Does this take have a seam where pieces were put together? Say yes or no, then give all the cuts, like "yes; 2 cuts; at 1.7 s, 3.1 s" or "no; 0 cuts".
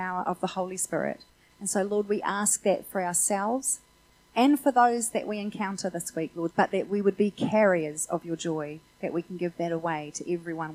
yes; 1 cut; at 6.5 s